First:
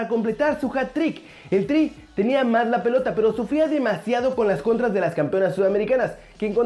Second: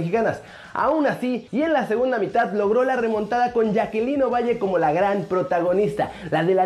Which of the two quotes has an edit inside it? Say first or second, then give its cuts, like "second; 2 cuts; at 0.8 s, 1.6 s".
second; 1 cut; at 1.5 s